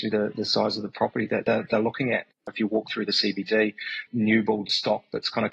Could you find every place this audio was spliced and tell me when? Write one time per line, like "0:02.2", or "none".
0:02.5
0:04.1